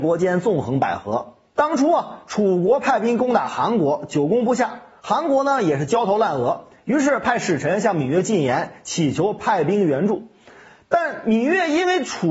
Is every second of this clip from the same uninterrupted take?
yes; 0 cuts

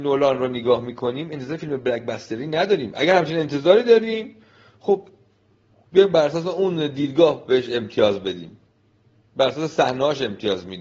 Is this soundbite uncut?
yes; 0 cuts

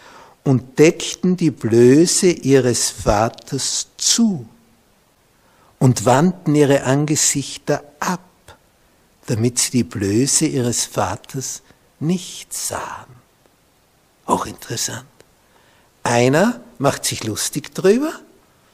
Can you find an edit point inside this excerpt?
no; 0 cuts

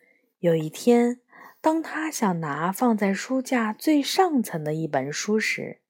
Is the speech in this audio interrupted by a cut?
no; 0 cuts

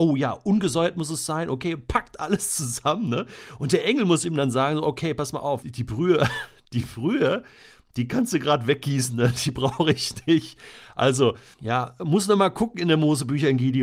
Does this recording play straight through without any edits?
no; 2 cuts; at 5.6 s, 11.5 s

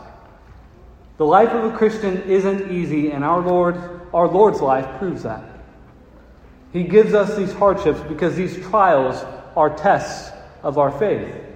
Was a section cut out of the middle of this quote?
no; 0 cuts

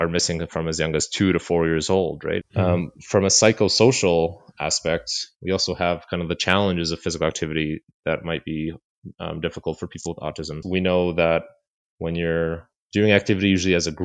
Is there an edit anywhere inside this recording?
yes; 2 cuts; at 2.4 s, 10.6 s

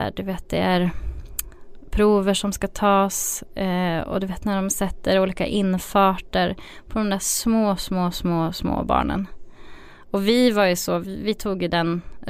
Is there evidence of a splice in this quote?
no; 0 cuts

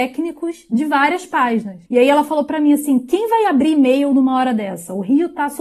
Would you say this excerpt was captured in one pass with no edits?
no; 1 cut; at 1.9 s

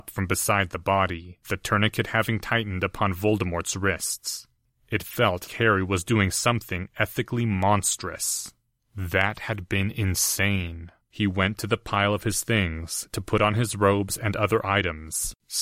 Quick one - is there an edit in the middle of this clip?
yes; 3 cuts; at 5.5 s, 8.8 s, 11.0 s

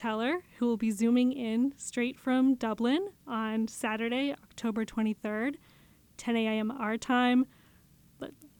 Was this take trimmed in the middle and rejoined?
no; 0 cuts

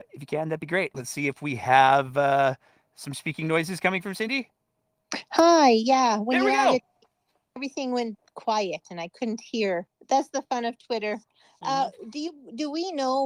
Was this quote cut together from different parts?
yes; 3 cuts; at 0.9 s, 7.6 s, 9.9 s

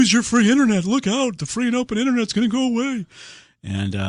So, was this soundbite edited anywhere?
no; 0 cuts

